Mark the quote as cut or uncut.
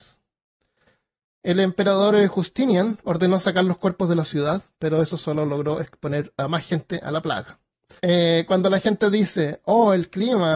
cut